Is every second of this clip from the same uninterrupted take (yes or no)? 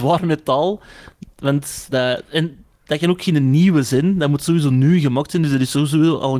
no